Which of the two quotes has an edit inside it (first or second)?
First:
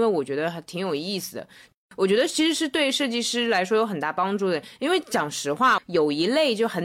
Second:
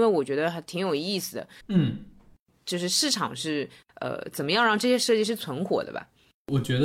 second